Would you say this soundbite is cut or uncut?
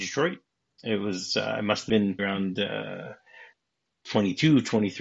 cut